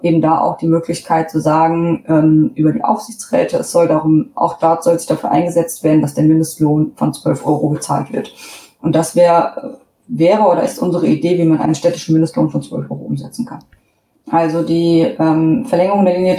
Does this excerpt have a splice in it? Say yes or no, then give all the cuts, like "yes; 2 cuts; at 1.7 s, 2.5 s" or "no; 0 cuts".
yes; 1 cut; at 14.2 s